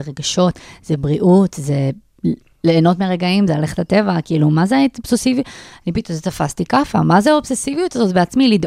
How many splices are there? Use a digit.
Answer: 0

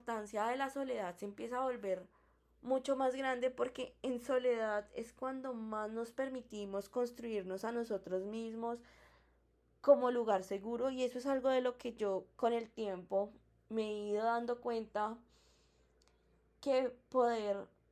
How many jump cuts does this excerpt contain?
0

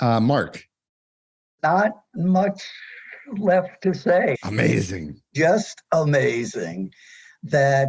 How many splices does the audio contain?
1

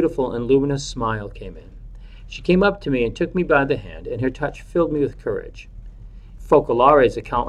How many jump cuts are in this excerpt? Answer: 1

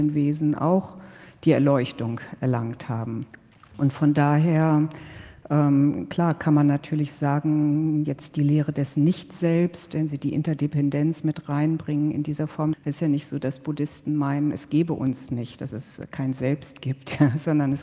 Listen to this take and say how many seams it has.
1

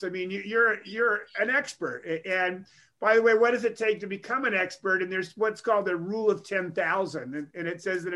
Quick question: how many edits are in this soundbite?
0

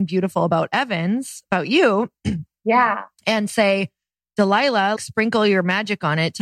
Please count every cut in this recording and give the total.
1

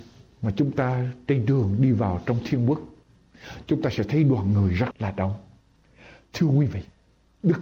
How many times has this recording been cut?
1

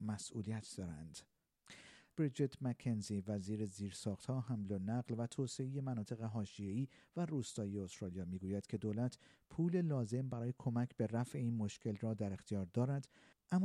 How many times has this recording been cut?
1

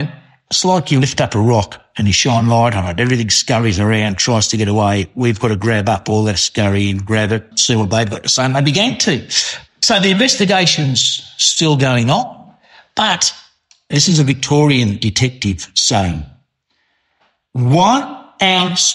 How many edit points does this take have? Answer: 2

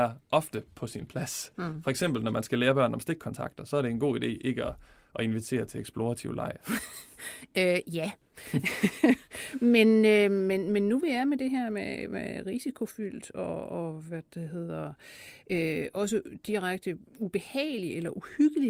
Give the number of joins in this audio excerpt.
0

